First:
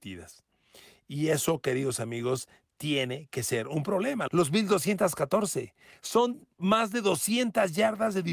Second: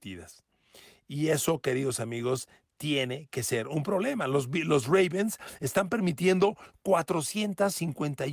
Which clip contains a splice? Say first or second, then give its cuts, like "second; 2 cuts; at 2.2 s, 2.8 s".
first; 2 cuts; at 4.3 s, 6.5 s